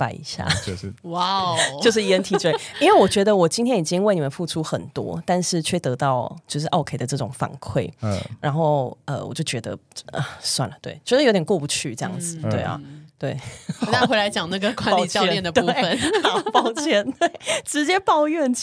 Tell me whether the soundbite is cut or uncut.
uncut